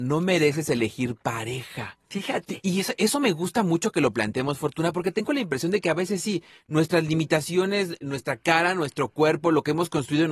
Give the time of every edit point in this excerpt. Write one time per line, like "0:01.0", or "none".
none